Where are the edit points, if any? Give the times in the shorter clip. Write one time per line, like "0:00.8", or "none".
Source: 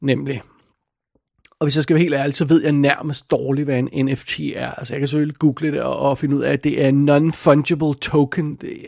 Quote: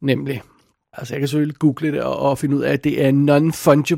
0:00.9